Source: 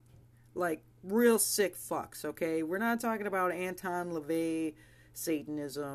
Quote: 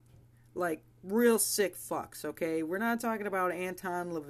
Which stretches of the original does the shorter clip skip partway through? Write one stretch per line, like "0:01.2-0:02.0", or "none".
none